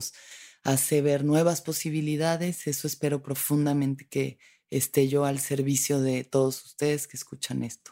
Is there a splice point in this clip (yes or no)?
no